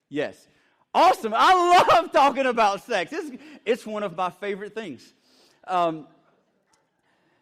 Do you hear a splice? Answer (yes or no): no